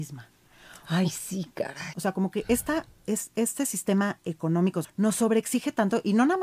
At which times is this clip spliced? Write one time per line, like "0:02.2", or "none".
0:01.9
0:04.8